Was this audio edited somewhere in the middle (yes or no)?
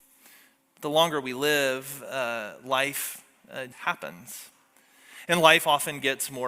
yes